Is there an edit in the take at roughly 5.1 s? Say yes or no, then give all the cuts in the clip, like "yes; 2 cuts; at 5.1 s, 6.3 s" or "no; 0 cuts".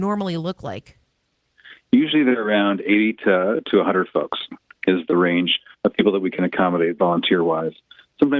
yes; 1 cut; at 5.1 s